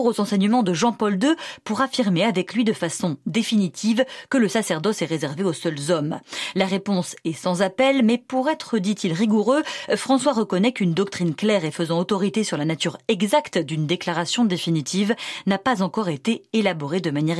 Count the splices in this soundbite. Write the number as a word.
zero